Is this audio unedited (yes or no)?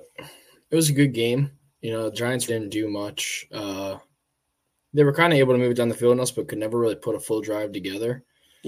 no